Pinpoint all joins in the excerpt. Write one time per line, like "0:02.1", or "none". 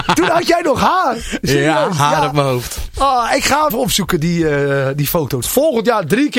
0:03.7
0:05.4